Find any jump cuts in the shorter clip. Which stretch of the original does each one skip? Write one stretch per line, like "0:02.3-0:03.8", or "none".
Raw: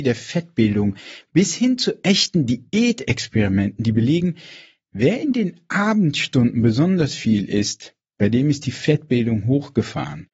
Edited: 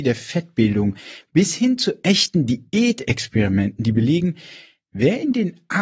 none